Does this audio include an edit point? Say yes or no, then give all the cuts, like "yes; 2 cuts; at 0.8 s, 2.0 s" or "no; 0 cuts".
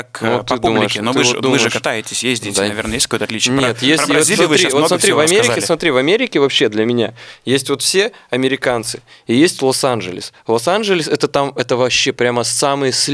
no; 0 cuts